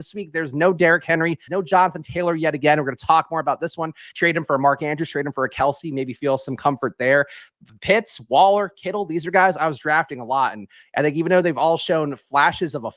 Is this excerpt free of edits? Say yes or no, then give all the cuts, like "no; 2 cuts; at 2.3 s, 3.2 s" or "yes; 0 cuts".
no; 2 cuts; at 1.5 s, 4.1 s